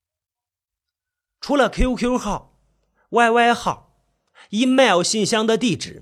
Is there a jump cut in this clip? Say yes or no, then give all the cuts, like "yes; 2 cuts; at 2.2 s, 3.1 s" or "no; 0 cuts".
no; 0 cuts